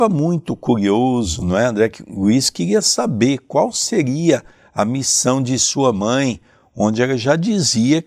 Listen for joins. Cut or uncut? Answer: uncut